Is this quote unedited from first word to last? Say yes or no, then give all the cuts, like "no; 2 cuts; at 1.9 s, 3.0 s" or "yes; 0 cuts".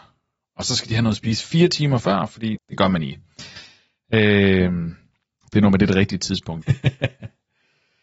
no; 2 cuts; at 2.6 s, 6.6 s